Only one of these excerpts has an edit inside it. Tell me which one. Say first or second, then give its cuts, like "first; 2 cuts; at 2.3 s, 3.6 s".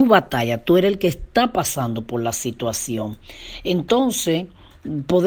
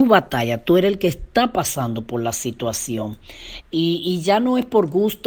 second; 1 cut; at 3.6 s